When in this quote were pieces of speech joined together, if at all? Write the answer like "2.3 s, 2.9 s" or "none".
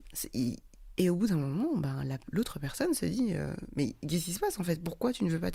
1.0 s